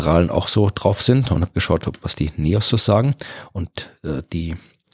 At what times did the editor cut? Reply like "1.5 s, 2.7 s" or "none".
none